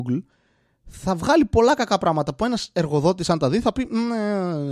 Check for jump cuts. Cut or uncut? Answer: uncut